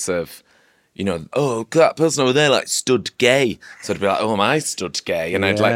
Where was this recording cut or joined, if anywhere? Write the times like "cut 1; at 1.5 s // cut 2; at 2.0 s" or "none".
cut 1; at 1.3 s